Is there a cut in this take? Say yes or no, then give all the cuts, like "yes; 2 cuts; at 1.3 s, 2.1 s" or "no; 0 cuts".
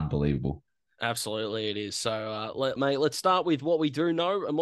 yes; 1 cut; at 2.8 s